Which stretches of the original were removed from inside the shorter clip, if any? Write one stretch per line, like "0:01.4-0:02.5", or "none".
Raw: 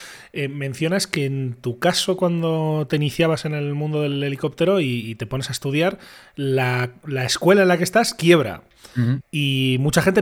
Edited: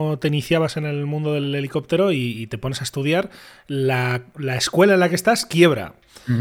none